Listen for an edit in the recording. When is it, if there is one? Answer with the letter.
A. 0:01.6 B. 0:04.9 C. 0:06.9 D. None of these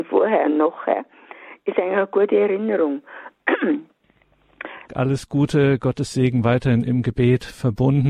B